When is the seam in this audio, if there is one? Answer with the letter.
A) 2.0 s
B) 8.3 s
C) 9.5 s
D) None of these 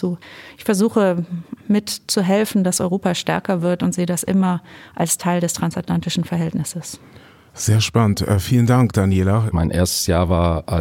C